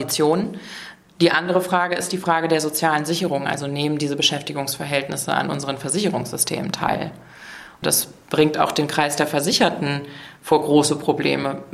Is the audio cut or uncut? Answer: uncut